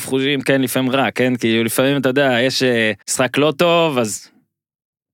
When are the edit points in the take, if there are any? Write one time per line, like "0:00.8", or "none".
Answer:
0:03.0